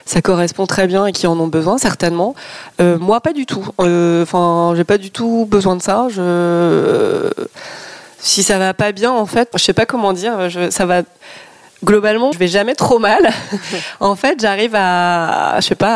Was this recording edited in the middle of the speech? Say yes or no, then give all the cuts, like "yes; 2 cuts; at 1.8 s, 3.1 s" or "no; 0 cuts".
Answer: yes; 2 cuts; at 9.5 s, 12.3 s